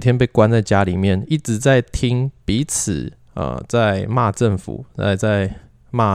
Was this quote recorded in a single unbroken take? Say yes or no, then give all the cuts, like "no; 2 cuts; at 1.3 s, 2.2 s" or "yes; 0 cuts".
yes; 0 cuts